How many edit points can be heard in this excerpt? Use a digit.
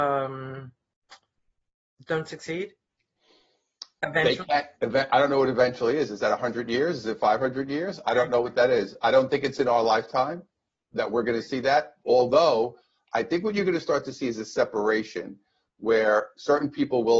1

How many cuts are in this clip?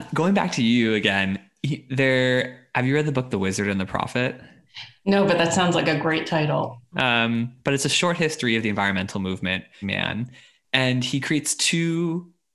2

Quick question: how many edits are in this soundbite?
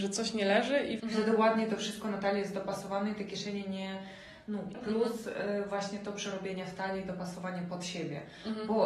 2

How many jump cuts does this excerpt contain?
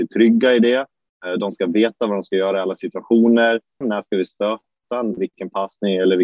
2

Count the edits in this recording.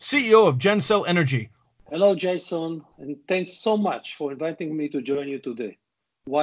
2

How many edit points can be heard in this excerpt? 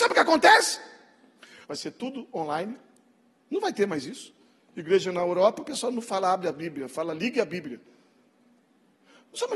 1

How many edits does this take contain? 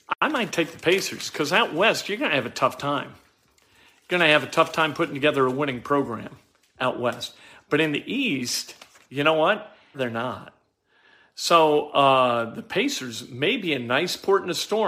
1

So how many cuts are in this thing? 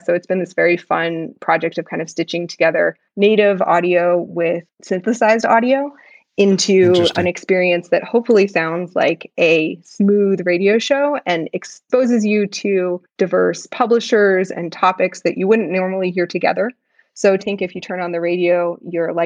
1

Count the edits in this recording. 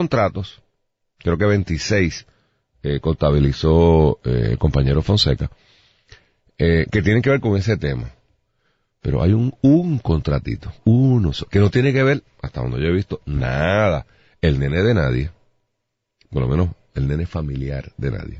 0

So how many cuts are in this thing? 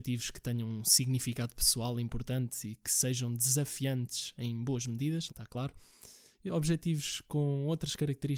1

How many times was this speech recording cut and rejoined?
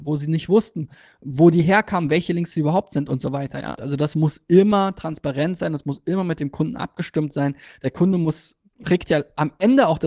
1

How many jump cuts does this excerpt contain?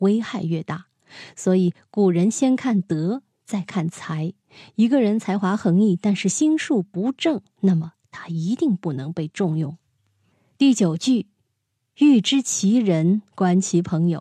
0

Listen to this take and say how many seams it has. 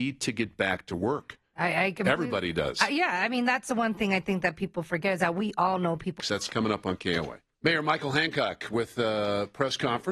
2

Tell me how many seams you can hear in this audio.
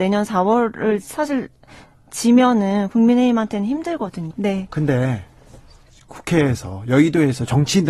1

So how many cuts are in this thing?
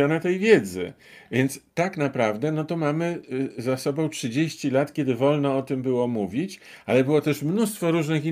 0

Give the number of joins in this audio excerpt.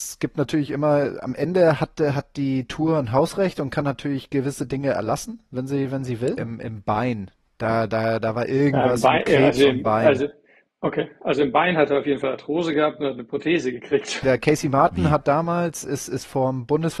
2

